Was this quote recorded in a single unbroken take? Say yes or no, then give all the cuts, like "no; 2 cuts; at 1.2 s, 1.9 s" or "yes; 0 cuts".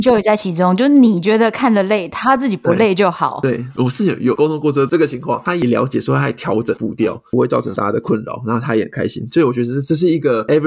yes; 0 cuts